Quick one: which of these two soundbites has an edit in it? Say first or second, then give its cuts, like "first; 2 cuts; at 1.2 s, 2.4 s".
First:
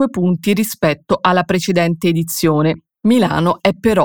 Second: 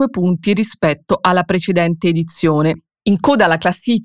first; 1 cut; at 2.9 s